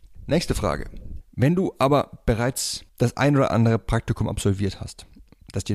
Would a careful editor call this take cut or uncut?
cut